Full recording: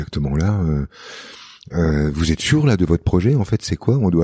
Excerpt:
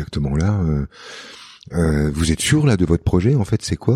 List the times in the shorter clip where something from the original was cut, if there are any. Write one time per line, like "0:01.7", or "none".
none